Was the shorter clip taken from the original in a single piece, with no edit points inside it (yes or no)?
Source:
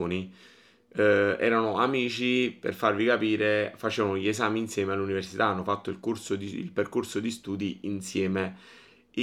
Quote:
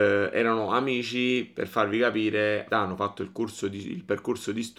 no